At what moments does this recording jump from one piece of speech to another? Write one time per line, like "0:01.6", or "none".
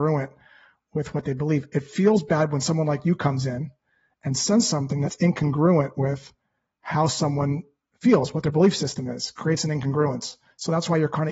none

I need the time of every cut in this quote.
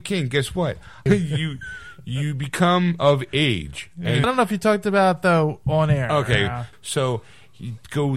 0:01.1
0:04.2
0:06.7

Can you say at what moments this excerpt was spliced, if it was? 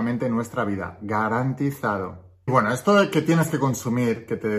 none

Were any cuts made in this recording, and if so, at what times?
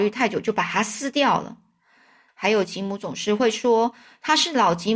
0:02.3

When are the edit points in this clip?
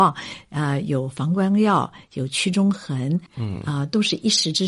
0:03.3

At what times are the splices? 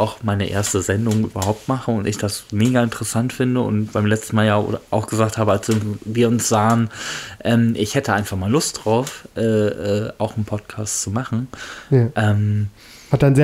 none

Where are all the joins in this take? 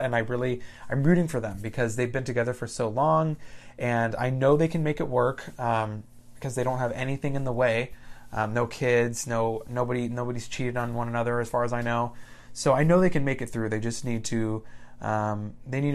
none

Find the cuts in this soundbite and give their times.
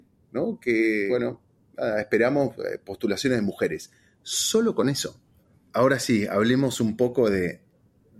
none

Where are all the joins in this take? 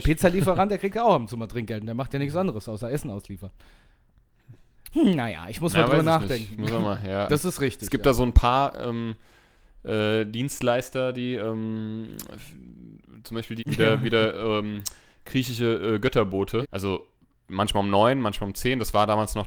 0:07.3
0:13.6
0:16.6

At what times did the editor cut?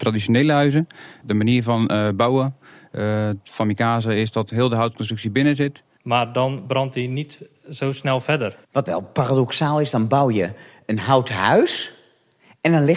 0:01.2
0:06.0

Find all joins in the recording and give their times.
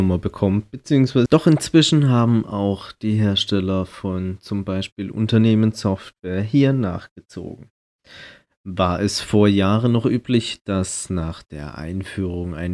0:01.3

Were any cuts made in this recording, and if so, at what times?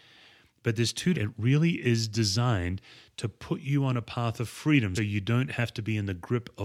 0:01.1
0:05.0

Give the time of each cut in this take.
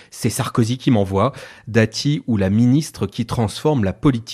none

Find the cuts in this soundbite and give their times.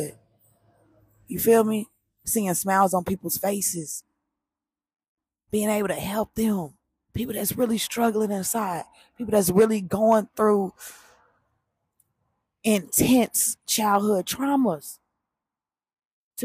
none

